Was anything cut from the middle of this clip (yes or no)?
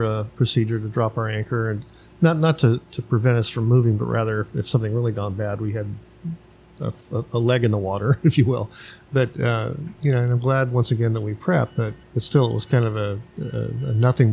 yes